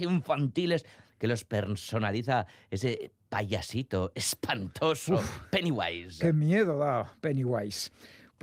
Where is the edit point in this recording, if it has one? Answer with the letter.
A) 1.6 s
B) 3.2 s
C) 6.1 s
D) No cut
D